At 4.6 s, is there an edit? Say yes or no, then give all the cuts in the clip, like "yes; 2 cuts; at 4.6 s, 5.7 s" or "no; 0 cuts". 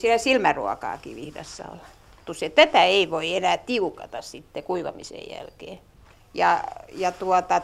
no; 2 cuts; at 2.3 s, 6.1 s